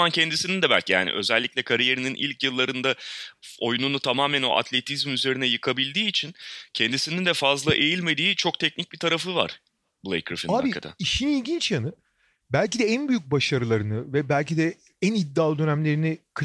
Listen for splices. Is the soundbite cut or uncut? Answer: uncut